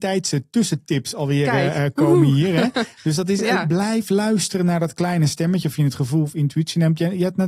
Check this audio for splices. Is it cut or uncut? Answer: uncut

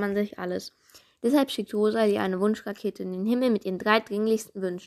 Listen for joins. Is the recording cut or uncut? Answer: uncut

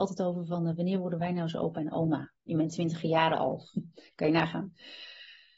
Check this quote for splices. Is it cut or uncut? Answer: uncut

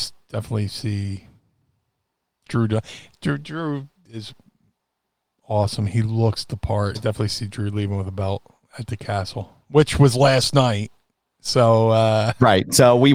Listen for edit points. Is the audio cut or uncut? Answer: cut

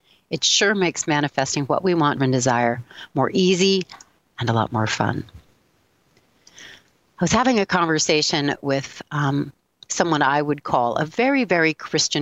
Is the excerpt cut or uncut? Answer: cut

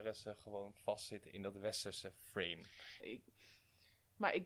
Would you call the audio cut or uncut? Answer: cut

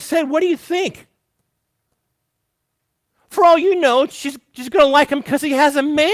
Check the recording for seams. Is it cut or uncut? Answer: uncut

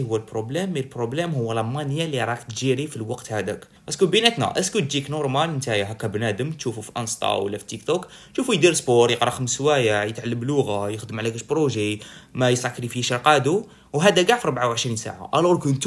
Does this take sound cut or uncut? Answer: uncut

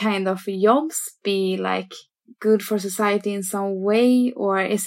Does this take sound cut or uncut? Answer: uncut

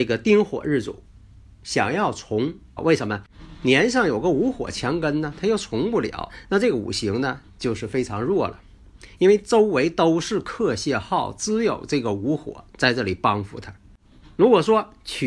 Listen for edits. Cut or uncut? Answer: cut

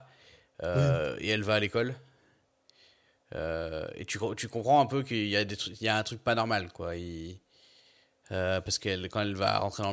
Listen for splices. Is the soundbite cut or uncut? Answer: uncut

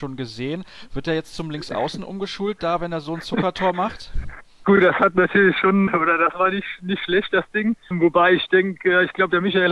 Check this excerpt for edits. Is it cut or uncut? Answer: uncut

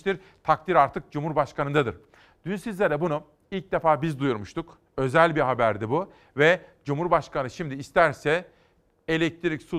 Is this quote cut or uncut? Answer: cut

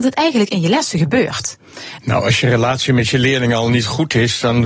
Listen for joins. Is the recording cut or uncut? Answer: cut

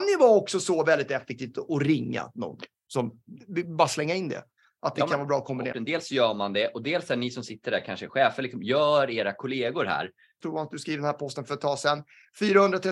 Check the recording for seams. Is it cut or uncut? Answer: cut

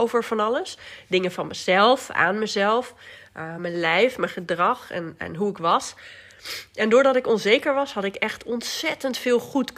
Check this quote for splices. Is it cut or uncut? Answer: uncut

